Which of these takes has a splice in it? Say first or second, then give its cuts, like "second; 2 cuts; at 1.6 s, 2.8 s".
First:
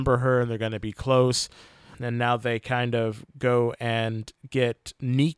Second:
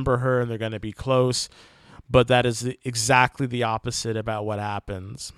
first; 1 cut; at 1.9 s